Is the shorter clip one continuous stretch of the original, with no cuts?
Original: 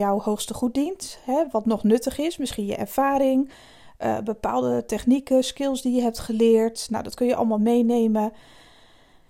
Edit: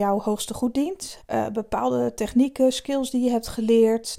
no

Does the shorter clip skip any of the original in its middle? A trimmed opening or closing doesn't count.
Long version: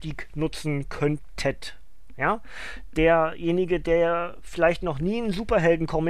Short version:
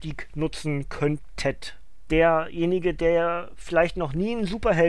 yes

